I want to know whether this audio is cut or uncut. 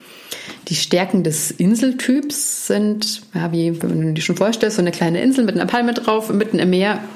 uncut